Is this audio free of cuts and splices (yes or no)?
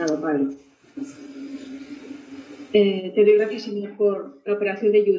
yes